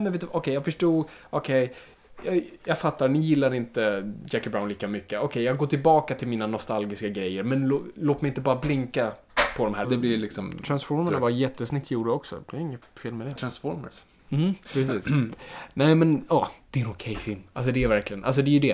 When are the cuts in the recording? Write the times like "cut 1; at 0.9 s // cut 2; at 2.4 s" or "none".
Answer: cut 1; at 9.8 s // cut 2; at 13.4 s // cut 3; at 16.6 s